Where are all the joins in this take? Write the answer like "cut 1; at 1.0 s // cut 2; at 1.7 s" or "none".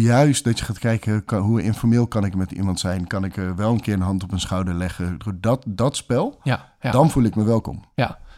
none